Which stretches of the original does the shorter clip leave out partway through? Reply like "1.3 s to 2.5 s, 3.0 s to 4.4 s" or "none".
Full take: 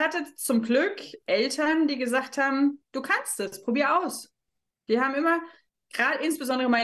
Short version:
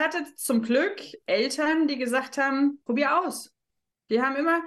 2.9 s to 3.6 s